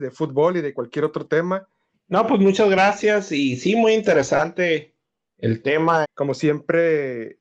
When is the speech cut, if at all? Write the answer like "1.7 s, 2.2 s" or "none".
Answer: 1.9 s, 6.0 s

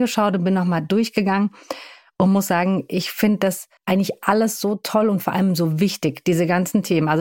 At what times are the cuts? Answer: 3.8 s

